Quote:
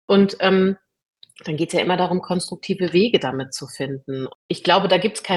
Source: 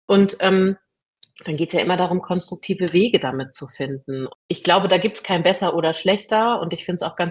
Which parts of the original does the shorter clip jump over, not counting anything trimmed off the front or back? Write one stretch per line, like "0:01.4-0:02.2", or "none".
none